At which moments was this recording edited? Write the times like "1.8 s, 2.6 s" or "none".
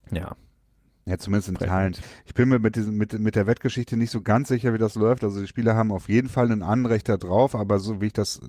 none